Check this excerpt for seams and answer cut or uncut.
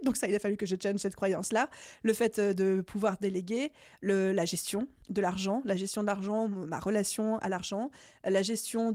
uncut